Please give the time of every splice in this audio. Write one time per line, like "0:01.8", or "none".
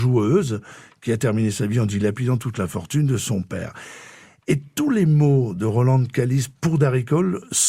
none